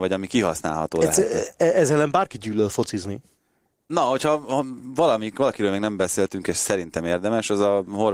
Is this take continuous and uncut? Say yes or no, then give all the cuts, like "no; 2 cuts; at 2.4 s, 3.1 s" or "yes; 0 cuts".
no; 1 cut; at 3.9 s